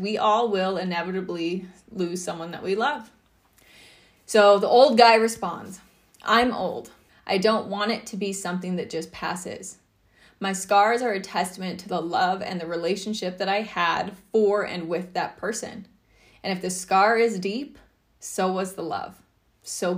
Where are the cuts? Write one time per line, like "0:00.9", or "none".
0:07.1

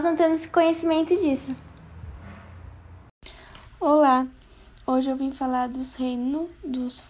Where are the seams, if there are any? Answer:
none

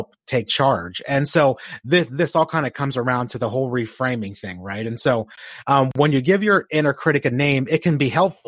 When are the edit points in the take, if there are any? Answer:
none

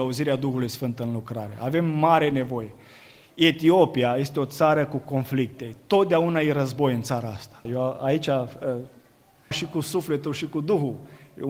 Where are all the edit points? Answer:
0:07.7
0:09.5

